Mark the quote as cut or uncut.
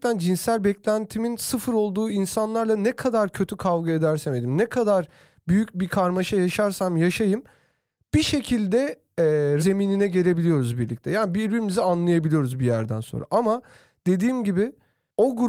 cut